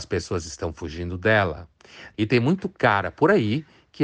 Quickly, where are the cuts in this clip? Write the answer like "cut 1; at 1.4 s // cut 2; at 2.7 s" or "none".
cut 1; at 2.1 s